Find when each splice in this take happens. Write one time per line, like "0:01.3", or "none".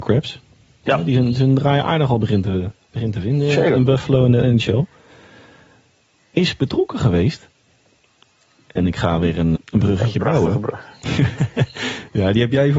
0:09.6